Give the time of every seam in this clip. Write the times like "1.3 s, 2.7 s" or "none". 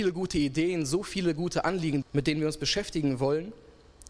2.0 s